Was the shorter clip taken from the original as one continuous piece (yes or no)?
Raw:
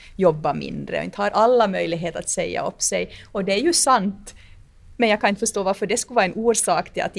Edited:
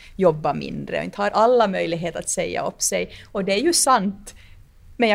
yes